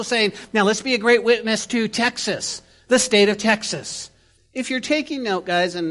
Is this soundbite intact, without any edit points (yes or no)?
no